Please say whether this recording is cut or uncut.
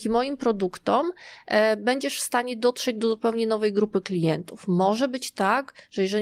uncut